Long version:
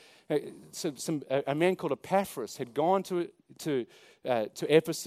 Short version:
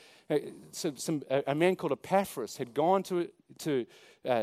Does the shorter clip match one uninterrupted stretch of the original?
yes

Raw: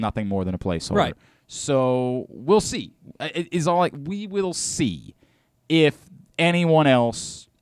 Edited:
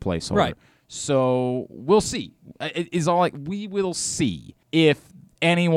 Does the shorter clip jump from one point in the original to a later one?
yes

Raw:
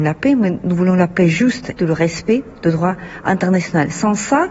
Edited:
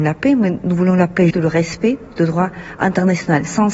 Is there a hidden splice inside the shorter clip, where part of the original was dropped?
yes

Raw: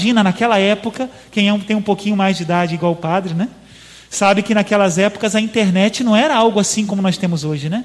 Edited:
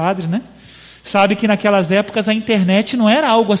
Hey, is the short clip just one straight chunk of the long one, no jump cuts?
yes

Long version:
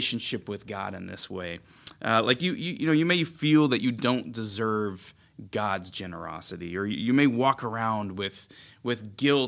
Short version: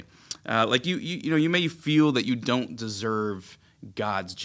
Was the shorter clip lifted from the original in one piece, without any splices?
yes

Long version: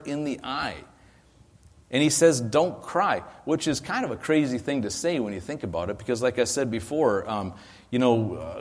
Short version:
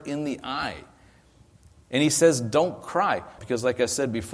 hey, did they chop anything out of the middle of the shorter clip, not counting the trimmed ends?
yes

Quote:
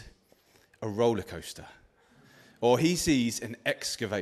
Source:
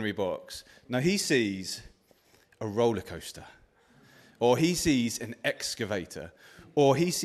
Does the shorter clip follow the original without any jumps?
yes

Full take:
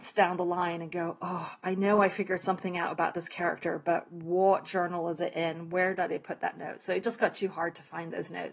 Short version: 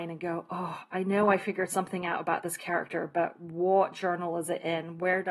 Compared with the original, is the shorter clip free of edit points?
yes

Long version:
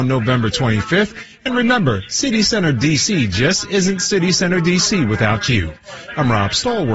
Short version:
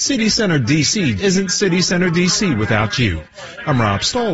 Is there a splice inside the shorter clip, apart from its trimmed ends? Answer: yes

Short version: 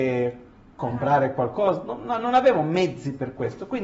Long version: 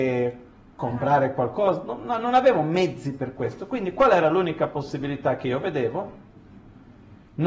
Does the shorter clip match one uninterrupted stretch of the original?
yes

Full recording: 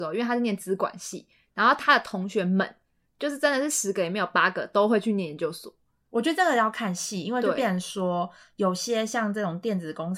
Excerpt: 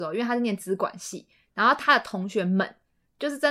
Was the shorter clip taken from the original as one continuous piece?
yes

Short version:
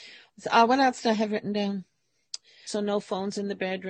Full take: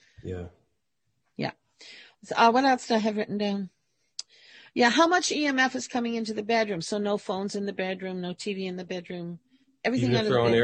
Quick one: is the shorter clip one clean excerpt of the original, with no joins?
no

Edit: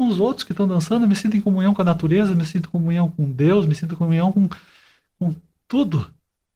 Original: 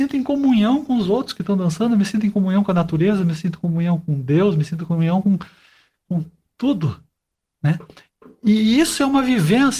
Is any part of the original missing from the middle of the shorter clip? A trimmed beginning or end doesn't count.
no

